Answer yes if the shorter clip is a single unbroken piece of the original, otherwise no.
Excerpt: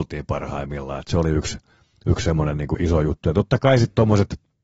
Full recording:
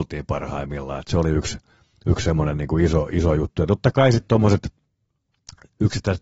no